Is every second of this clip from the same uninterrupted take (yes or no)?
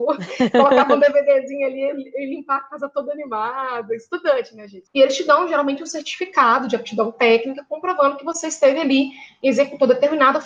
no